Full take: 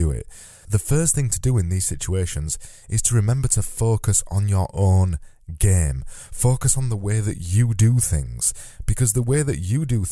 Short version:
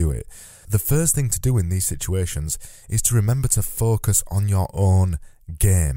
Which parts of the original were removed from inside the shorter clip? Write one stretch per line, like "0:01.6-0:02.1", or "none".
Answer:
none

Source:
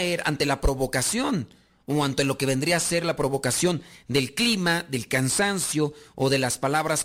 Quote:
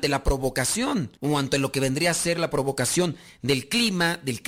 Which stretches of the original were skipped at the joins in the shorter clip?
0:01.5-0:01.8

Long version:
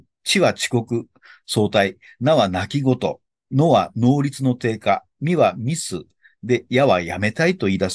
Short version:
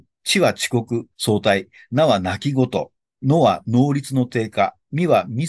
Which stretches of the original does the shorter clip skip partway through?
0:01.1-0:01.4

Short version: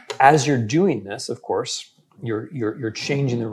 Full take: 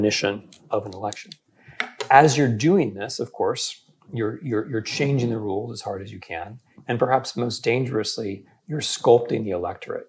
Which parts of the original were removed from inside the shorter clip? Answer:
none

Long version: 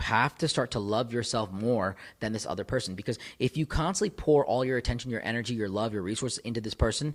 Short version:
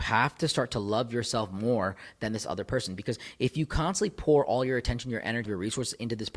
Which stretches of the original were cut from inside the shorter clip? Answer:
0:05.5-0:05.9

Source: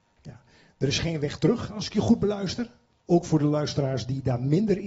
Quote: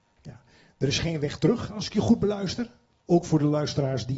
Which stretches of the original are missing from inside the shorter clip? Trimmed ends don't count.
none

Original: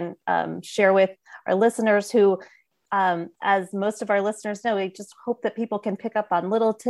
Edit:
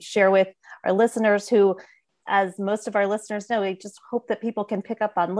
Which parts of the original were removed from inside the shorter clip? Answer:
0:02.8-0:03.3

